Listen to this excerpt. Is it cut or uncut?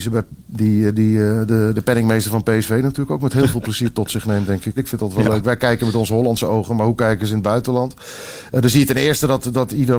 cut